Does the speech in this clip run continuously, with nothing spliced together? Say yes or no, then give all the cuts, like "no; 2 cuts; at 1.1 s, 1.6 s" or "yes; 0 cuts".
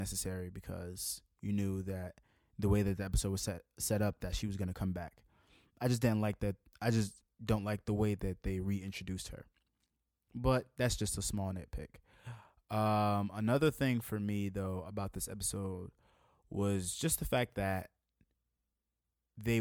yes; 0 cuts